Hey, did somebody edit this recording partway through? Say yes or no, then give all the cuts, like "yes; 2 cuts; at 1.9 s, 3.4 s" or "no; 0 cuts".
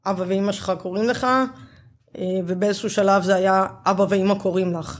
no; 0 cuts